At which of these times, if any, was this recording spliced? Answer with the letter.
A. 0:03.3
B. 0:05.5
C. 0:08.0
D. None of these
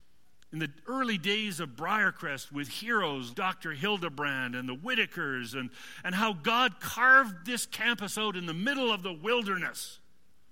A